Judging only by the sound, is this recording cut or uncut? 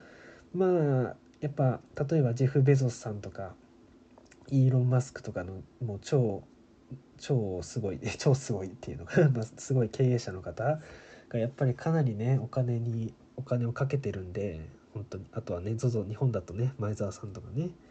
uncut